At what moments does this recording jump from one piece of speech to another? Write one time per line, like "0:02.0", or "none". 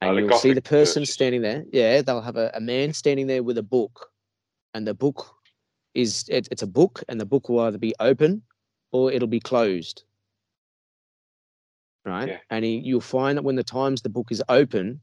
none